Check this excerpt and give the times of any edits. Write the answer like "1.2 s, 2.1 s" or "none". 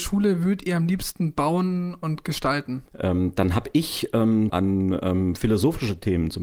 2.9 s, 4.5 s